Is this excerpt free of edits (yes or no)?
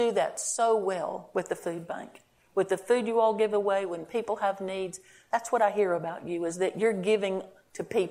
yes